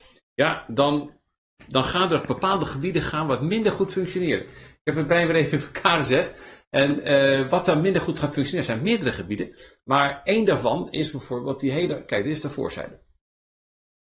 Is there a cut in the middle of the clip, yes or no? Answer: no